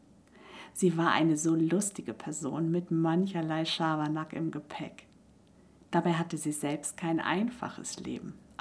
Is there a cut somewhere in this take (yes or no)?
no